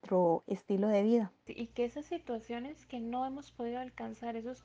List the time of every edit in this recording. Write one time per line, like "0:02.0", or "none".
0:01.5